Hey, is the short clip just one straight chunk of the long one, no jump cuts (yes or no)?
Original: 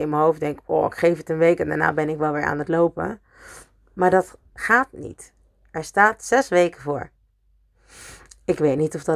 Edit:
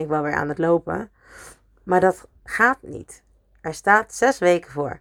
yes